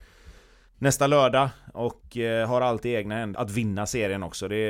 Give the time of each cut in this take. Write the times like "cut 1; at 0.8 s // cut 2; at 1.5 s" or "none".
cut 1; at 3.3 s